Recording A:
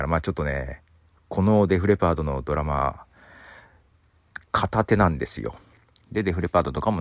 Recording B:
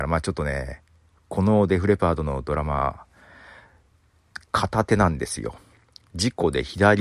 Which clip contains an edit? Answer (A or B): A